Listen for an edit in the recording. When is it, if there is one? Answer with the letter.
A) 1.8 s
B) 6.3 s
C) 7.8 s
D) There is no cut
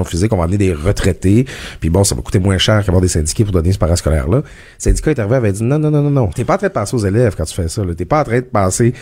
B